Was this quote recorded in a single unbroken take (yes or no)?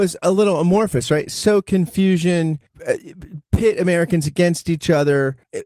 yes